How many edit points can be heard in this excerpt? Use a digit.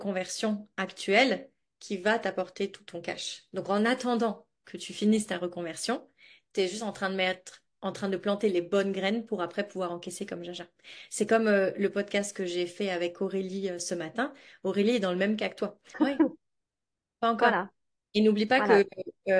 1